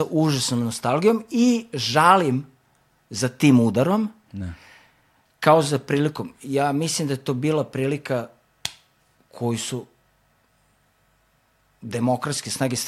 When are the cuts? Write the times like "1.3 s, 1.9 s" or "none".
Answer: none